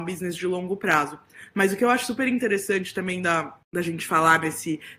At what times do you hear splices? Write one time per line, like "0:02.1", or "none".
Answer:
0:03.6